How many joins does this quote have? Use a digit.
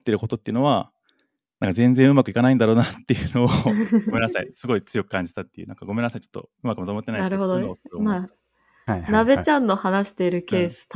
0